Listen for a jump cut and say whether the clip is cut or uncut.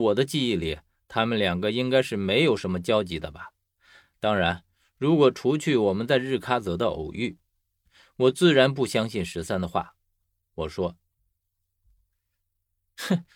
uncut